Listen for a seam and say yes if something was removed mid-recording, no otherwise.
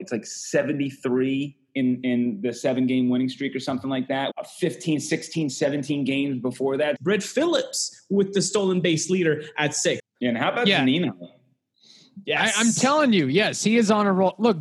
yes